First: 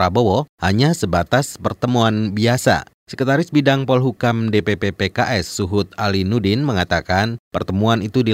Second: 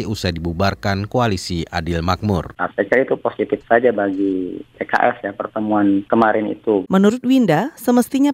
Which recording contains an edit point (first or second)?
second